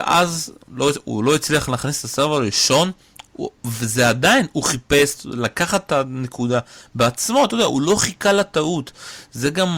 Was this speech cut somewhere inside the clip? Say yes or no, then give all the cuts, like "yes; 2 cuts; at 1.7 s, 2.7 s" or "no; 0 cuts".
no; 0 cuts